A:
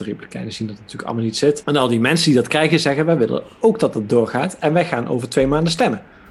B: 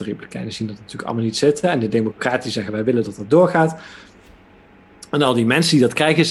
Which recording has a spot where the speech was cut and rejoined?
A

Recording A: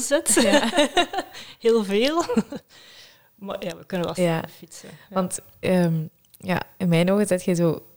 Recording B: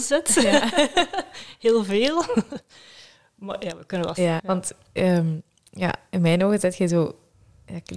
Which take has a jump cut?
B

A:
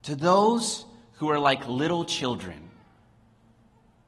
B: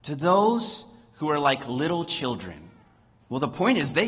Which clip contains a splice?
B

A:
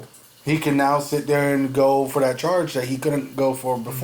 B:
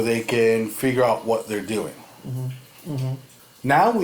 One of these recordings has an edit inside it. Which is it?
B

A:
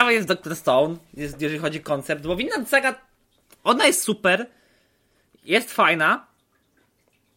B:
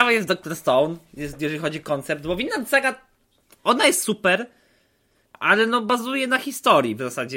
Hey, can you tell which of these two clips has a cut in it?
B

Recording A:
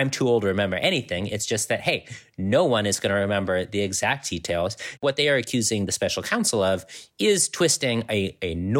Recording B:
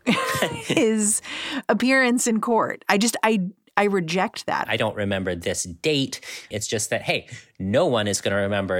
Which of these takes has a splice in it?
B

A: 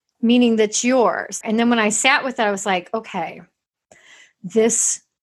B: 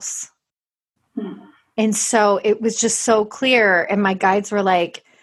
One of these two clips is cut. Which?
A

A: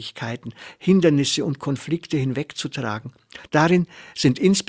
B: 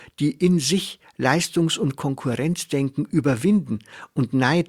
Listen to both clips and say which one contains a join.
A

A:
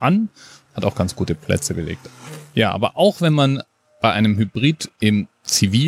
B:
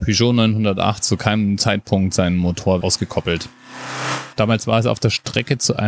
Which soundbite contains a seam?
B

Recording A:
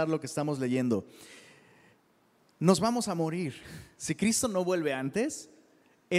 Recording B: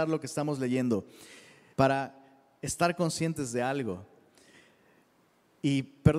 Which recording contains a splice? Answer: B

